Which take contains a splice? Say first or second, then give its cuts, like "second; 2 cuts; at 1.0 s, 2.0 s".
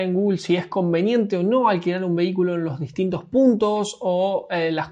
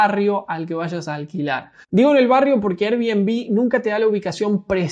second; 1 cut; at 1.8 s